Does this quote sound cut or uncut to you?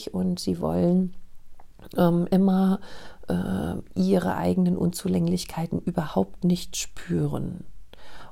uncut